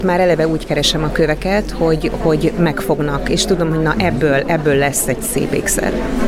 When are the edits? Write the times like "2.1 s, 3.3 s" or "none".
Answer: none

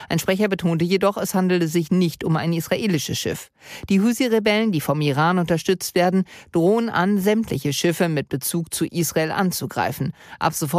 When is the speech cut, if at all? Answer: none

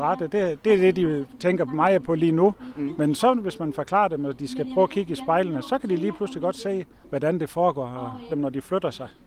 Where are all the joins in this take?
8.3 s

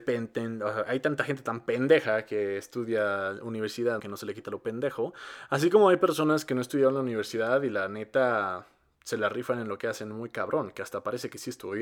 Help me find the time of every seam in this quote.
4.0 s

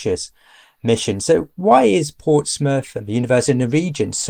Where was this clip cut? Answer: 1.2 s

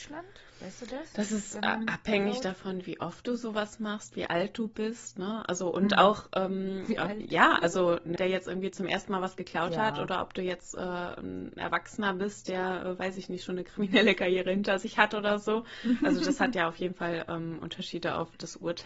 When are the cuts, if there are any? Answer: 8.2 s

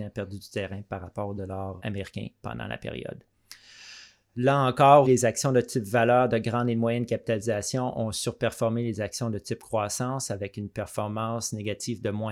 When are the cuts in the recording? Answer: 1.8 s, 5.0 s

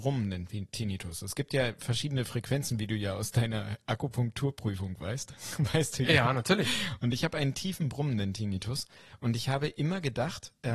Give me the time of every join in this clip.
none

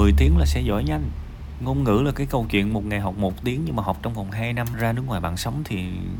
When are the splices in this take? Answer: 4.7 s

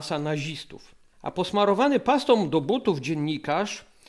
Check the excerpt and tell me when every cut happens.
none

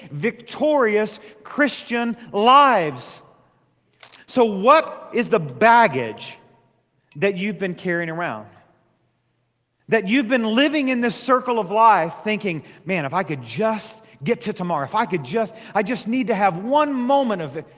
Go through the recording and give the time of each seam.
4.1 s

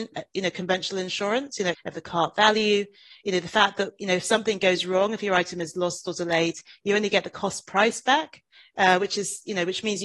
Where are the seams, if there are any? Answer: 1.7 s

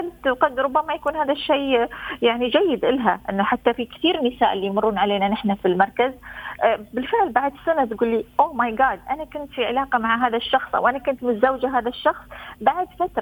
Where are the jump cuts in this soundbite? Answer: none

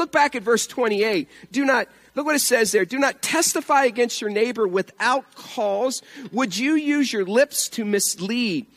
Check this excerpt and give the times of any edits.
none

